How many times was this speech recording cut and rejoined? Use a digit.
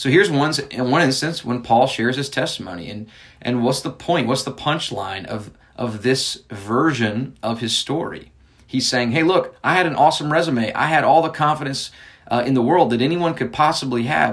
0